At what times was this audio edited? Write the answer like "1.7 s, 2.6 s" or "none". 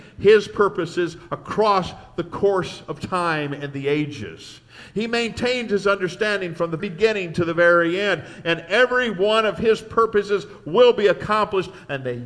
6.8 s